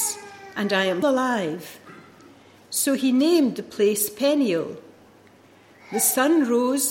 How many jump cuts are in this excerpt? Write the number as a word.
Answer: one